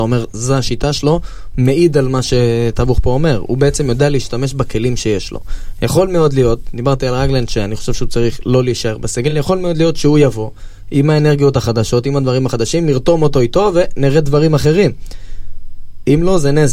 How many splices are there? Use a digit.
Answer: 0